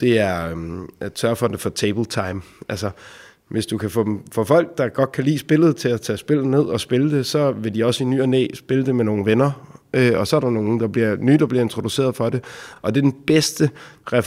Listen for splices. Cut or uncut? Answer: uncut